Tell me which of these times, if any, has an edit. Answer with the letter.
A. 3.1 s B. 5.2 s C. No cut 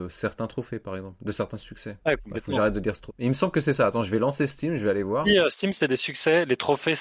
A